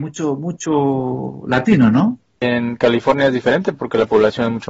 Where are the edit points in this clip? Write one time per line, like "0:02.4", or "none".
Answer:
0:02.4